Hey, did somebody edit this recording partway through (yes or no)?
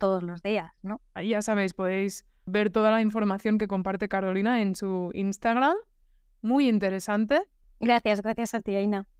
yes